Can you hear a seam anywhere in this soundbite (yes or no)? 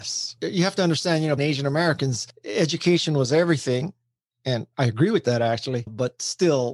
yes